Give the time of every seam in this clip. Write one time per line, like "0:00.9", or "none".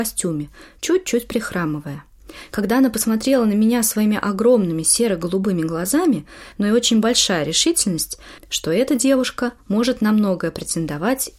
0:06.5
0:08.4